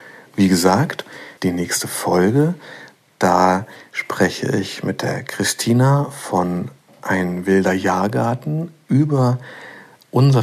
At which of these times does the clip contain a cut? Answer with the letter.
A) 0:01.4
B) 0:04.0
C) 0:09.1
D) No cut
A